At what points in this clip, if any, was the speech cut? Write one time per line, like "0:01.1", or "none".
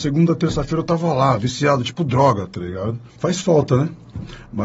0:03.1